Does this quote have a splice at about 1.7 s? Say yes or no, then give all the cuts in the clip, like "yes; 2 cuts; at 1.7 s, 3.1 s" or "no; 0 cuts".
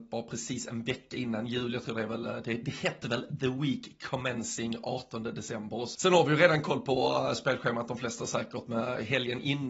no; 1 cut; at 5.9 s